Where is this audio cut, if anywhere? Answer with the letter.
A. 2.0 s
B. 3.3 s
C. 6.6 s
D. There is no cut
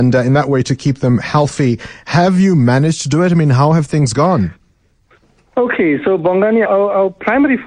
C